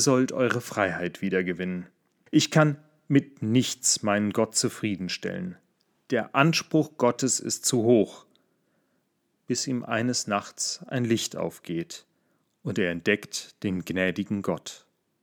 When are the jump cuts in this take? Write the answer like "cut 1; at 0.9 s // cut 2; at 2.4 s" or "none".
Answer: cut 1; at 2.3 s